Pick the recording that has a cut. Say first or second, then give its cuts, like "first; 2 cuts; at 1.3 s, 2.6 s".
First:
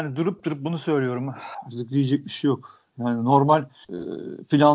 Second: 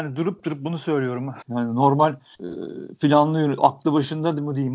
second; 1 cut; at 1.4 s